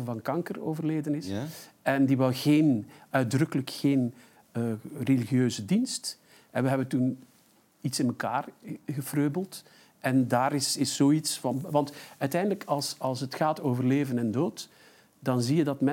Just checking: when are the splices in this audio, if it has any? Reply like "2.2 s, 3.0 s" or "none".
none